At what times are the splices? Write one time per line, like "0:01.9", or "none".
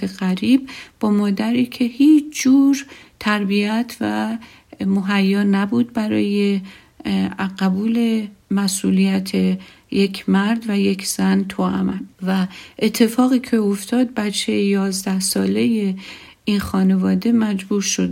0:12.1